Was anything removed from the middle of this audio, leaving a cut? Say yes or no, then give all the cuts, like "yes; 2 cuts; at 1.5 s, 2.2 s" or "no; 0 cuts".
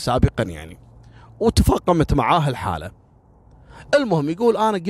no; 0 cuts